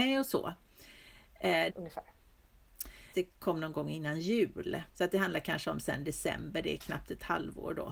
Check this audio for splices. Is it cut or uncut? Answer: cut